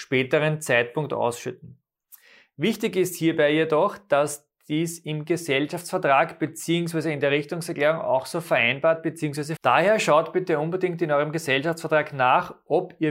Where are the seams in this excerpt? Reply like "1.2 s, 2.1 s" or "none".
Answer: 9.6 s